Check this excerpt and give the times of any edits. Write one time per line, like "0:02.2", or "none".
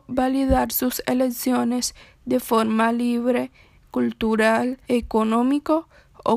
0:03.8
0:04.8